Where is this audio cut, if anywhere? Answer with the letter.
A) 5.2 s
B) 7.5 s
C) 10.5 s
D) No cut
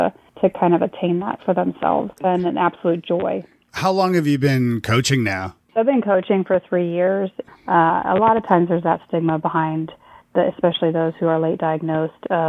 B